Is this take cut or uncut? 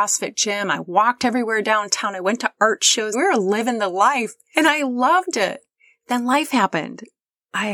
cut